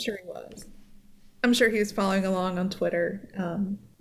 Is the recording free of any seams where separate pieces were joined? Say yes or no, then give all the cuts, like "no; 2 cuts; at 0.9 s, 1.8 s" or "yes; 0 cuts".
yes; 0 cuts